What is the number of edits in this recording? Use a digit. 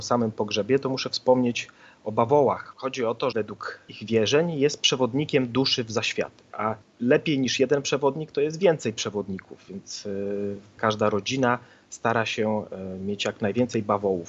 2